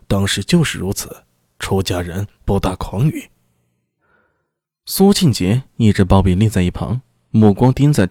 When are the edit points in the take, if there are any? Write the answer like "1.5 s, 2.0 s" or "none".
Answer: none